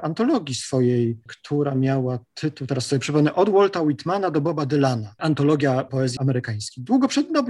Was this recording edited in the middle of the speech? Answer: no; 0 cuts

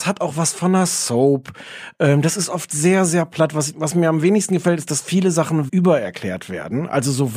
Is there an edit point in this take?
yes; 1 cut; at 5.7 s

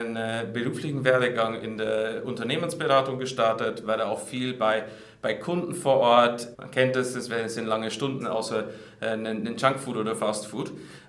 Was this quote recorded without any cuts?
no; 2 cuts; at 6.5 s, 8.2 s

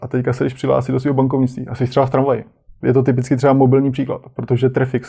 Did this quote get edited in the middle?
yes; 1 cut; at 2.8 s

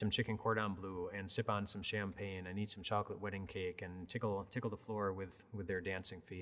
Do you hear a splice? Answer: no; 0 cuts

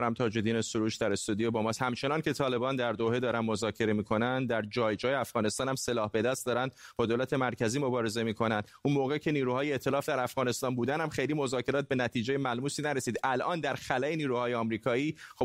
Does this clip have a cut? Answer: no; 0 cuts

